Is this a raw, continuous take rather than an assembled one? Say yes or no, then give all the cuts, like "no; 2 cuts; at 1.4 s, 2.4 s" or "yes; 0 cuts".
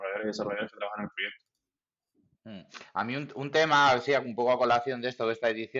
yes; 0 cuts